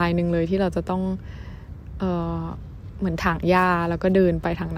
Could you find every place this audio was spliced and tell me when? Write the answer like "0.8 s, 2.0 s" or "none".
none